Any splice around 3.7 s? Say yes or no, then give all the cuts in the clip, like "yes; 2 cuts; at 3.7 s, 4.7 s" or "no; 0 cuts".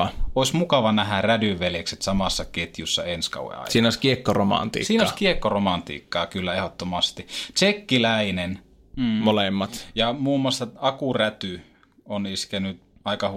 no; 1 cut; at 8.9 s